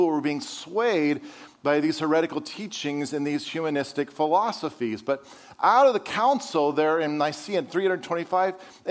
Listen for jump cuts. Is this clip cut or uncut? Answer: uncut